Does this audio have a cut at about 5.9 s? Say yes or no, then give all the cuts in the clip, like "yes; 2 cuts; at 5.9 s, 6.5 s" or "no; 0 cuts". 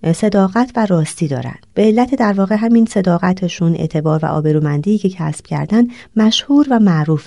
no; 1 cut; at 1.7 s